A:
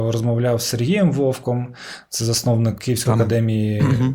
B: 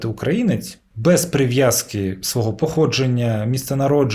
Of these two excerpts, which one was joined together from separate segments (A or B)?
A